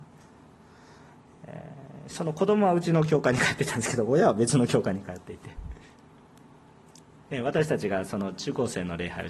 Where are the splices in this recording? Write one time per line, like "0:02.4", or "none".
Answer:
none

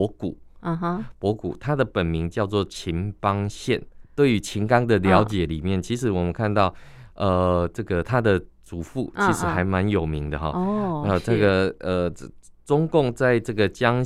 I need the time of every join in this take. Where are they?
0:04.0

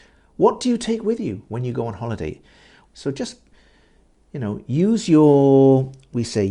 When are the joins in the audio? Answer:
0:02.8

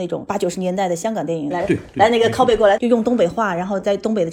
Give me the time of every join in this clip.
0:01.5
0:02.8

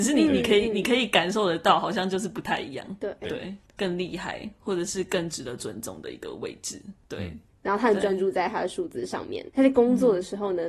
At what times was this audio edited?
0:03.6
0:07.5
0:09.5

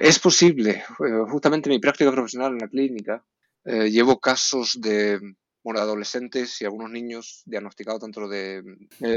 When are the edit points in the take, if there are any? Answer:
none

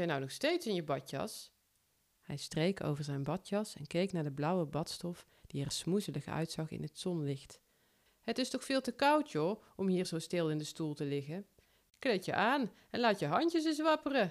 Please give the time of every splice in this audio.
none

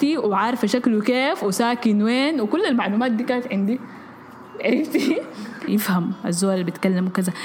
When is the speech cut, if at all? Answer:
0:05.7

